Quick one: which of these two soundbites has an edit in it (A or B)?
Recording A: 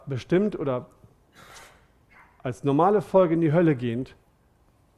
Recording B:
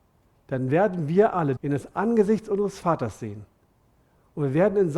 B